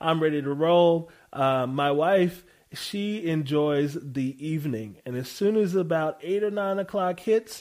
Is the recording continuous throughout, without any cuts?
yes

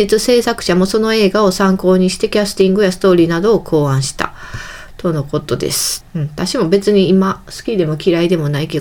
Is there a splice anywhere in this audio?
yes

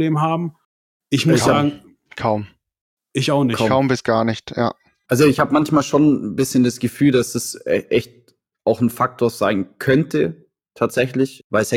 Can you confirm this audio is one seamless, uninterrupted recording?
yes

